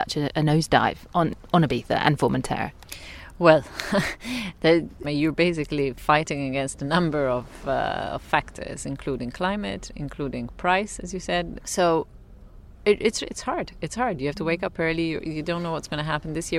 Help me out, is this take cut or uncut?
cut